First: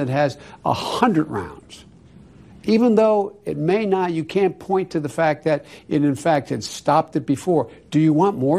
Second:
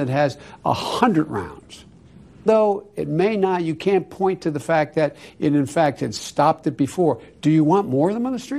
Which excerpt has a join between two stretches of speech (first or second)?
second